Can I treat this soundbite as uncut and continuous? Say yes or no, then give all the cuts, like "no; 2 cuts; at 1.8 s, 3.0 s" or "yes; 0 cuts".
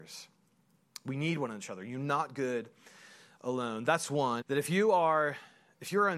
no; 1 cut; at 4.4 s